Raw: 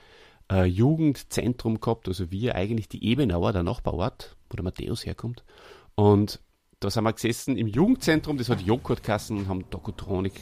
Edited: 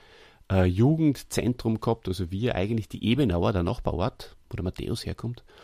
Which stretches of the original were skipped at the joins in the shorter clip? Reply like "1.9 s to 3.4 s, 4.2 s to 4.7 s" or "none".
none